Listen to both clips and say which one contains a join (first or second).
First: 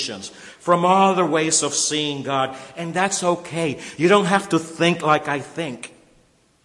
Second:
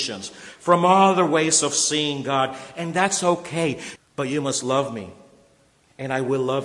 second